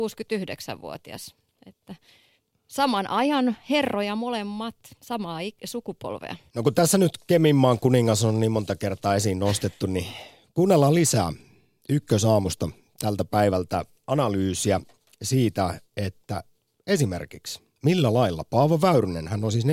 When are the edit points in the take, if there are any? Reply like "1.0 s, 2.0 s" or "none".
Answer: 6.5 s